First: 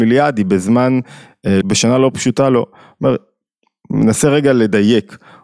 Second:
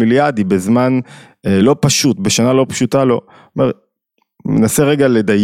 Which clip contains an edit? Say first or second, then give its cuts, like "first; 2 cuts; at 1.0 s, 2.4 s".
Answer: first; 1 cut; at 1.6 s